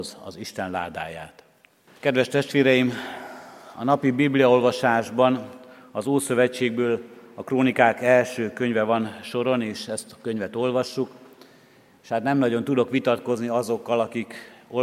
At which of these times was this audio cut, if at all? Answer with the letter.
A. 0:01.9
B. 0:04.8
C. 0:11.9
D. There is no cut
A